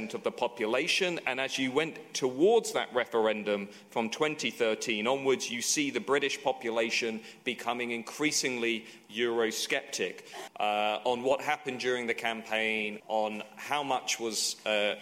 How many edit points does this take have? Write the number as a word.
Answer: two